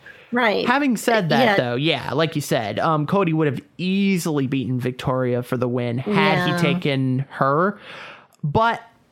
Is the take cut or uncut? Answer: uncut